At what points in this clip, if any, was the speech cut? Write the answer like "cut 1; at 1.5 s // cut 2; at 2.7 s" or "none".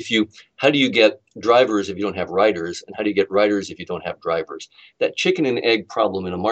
none